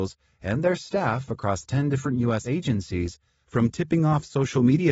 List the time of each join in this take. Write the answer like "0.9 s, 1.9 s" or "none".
none